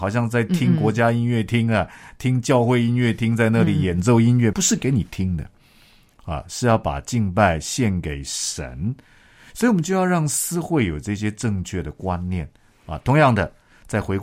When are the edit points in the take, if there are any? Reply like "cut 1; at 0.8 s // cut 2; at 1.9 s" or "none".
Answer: cut 1; at 4.5 s